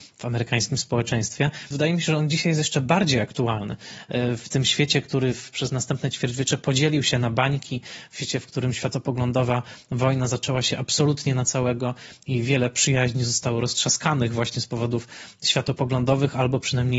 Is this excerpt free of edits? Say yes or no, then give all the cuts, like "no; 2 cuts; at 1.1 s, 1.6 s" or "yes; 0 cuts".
no; 1 cut; at 1.7 s